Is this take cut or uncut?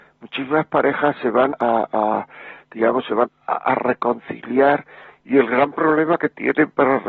cut